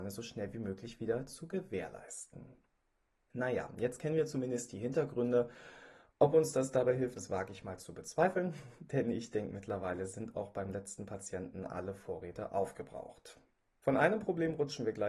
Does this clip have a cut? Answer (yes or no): yes